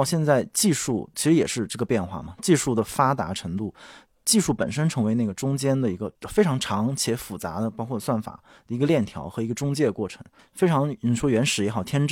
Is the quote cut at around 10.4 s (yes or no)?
yes